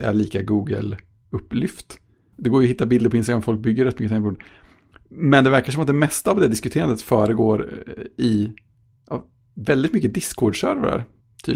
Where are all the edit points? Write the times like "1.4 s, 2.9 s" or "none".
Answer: 2.3 s

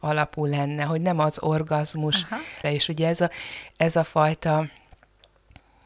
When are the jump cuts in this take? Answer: 2.6 s, 3.7 s

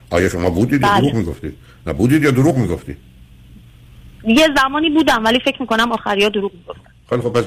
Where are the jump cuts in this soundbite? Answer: none

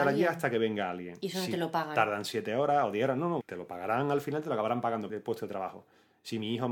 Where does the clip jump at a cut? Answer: 3.4 s, 5.1 s

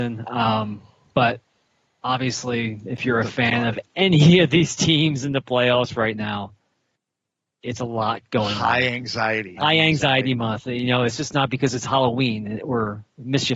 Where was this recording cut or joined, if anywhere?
9.6 s

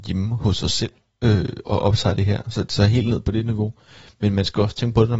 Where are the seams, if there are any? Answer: 1.6 s

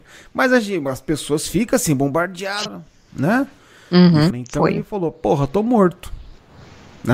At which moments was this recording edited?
2.7 s, 4.3 s

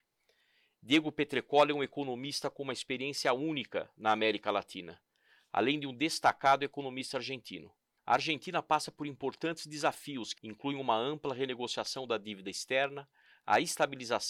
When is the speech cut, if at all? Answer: 8.0 s, 10.4 s

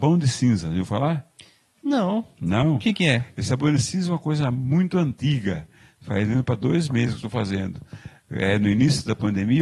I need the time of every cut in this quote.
none

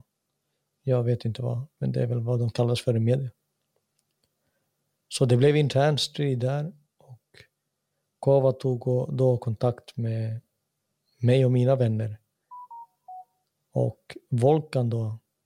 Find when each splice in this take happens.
1.8 s, 13.5 s

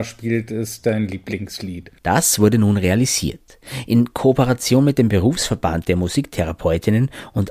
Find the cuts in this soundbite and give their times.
2.0 s

